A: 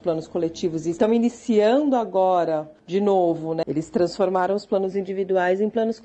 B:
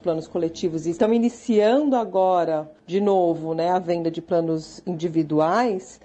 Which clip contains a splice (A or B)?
A